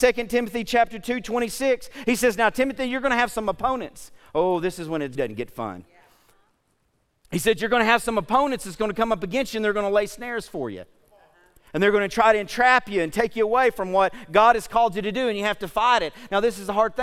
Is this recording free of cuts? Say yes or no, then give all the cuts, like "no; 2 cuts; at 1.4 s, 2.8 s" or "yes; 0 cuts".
no; 1 cut; at 5.2 s